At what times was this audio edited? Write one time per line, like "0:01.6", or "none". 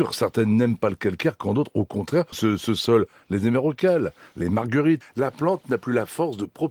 0:02.3
0:05.0